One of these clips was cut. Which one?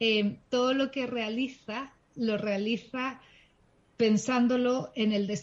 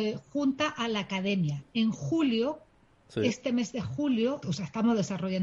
second; 1 cut; at 4.4 s

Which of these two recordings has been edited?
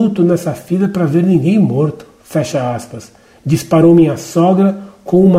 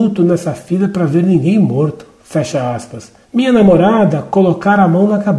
second; 1 cut; at 3.2 s

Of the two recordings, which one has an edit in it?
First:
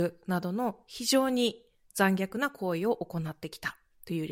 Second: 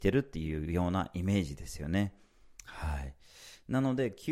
second; 1 cut; at 2.6 s

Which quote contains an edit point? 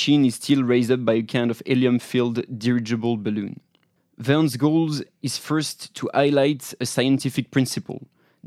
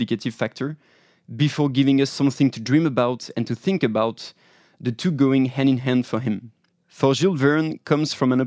first; 1 cut; at 4.0 s

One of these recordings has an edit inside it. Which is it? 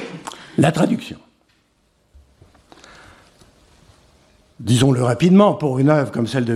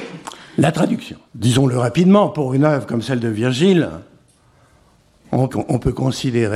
second; 2 cuts; at 1.3 s, 5.5 s

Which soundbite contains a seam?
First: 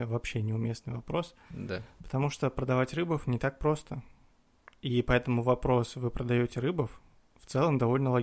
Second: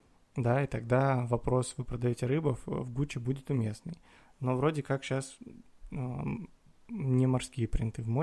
first; 1 cut; at 1.5 s

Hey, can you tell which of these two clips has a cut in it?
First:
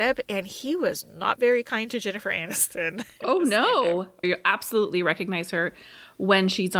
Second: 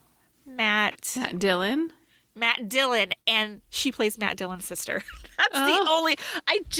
first; 1 cut; at 4.2 s

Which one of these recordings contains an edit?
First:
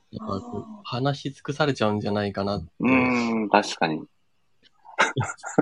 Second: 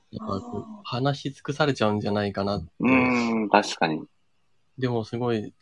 first; 1 cut; at 4.6 s

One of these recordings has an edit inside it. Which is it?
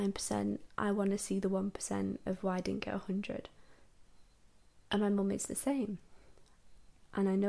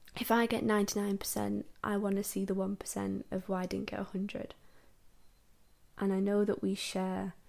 second; 1 cut; at 5.9 s

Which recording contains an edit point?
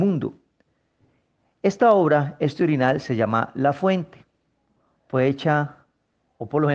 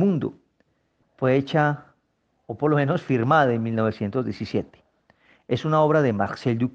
second; 1 cut; at 1.0 s

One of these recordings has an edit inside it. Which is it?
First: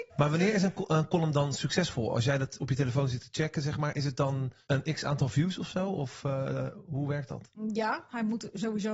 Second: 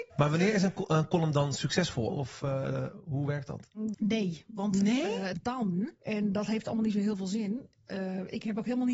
second; 3 cuts; at 2.1 s, 3.9 s, 5.3 s

